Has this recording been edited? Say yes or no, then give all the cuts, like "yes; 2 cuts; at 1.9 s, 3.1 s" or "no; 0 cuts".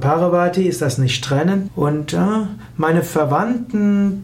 yes; 1 cut; at 1.7 s